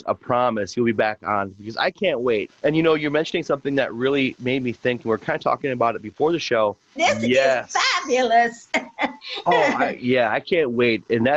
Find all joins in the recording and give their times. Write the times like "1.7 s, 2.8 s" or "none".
2.5 s, 7.0 s